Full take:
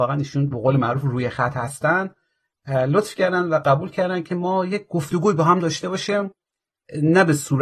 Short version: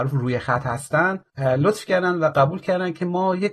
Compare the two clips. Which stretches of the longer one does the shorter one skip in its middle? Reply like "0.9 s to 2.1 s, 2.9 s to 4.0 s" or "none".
2.2 s to 2.6 s